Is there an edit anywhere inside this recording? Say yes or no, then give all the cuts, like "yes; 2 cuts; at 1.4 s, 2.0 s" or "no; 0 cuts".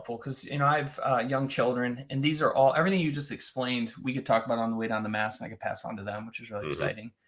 no; 0 cuts